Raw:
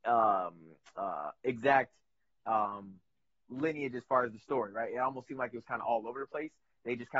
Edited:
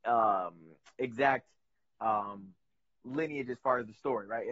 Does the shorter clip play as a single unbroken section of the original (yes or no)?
no